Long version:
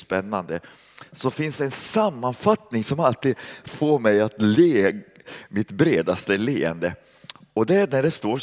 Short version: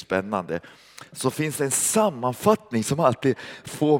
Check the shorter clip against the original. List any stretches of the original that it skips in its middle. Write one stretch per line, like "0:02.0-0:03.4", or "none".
none